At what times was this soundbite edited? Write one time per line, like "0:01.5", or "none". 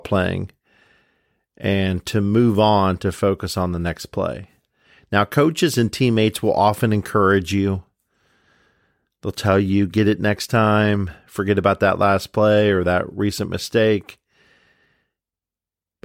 none